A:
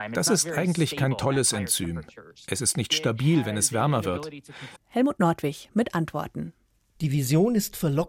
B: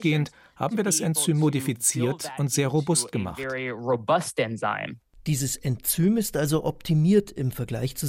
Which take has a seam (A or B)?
A